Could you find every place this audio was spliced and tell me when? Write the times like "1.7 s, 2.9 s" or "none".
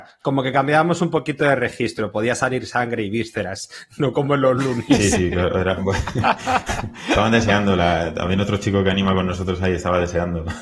none

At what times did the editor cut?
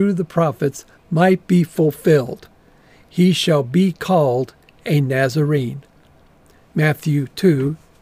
none

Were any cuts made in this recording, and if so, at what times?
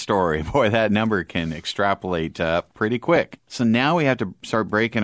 none

